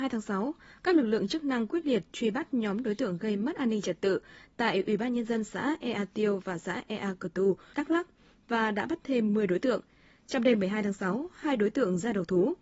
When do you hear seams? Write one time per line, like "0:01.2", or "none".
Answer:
0:07.7